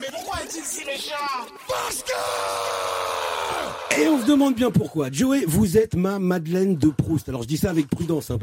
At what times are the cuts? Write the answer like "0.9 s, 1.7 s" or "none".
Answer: none